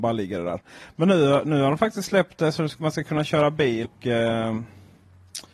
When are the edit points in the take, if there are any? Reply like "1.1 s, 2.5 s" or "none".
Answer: 3.8 s